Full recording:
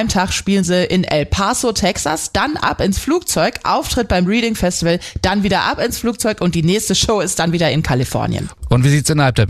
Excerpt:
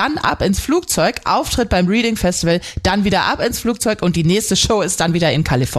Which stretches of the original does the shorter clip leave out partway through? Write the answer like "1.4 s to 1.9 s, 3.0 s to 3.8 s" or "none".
none